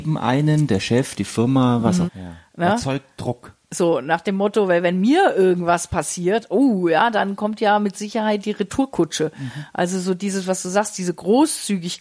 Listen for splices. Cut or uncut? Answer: cut